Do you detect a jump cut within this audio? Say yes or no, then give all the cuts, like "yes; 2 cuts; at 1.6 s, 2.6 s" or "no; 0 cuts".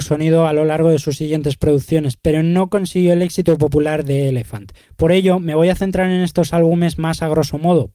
no; 0 cuts